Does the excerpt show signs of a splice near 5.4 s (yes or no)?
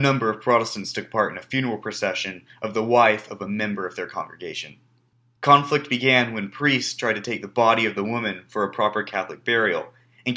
yes